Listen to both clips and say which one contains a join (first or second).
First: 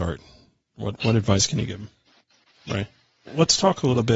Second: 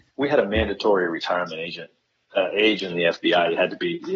first